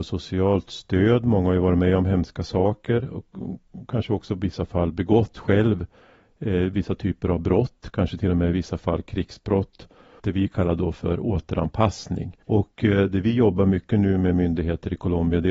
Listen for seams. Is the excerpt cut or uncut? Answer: cut